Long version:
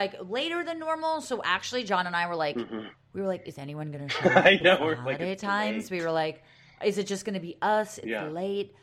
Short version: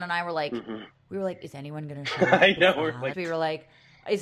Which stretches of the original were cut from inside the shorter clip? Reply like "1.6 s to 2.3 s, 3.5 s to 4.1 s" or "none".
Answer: 5.2 s to 5.9 s